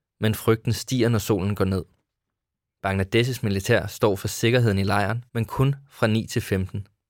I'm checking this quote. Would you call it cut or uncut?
cut